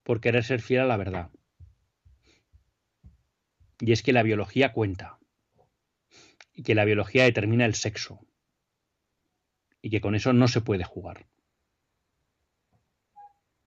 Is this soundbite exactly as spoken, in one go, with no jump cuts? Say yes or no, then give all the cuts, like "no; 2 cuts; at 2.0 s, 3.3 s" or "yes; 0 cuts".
yes; 0 cuts